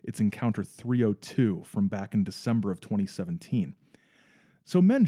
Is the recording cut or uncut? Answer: uncut